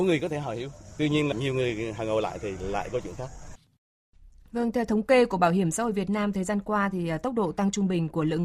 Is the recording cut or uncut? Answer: uncut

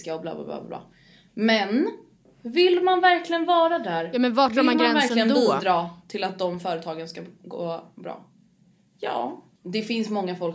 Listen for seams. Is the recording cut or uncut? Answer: uncut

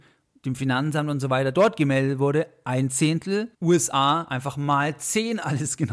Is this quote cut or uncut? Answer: cut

